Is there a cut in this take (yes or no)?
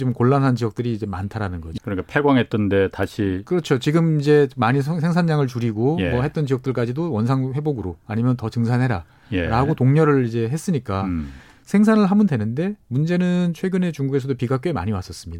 yes